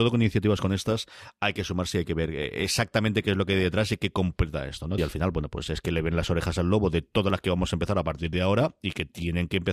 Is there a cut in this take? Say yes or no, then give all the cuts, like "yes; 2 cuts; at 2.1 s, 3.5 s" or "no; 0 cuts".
yes; 1 cut; at 5.0 s